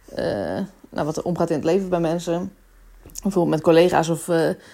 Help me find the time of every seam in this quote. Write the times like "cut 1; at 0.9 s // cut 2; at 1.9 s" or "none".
none